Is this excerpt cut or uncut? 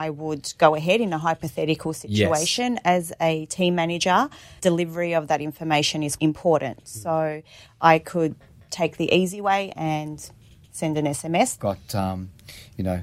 cut